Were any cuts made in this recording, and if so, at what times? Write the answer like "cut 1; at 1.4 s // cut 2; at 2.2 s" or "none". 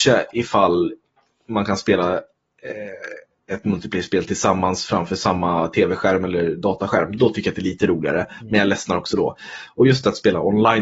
none